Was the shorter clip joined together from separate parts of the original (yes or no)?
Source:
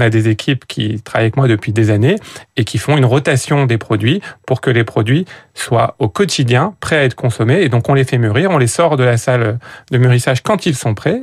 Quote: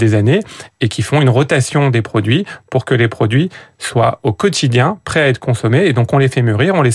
no